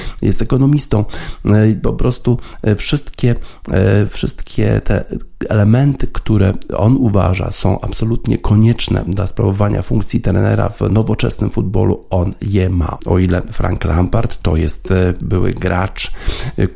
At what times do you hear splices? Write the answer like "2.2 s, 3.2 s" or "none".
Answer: 13.0 s

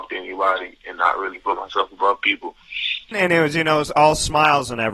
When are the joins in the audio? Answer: 3.1 s

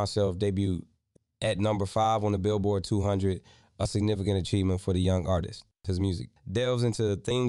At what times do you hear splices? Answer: 6.4 s

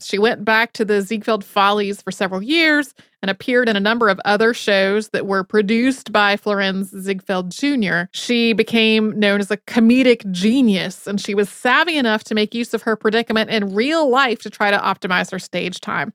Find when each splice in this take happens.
8.1 s

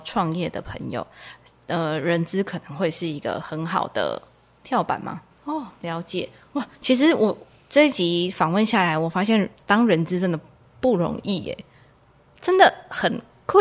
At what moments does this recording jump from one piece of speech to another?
5.3 s

